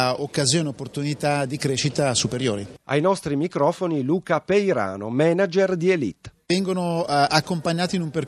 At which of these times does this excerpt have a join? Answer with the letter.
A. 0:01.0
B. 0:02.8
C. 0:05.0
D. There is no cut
B